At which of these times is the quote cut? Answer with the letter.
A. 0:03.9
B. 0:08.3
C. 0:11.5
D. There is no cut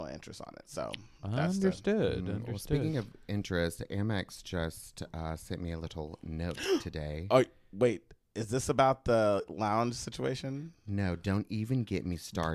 D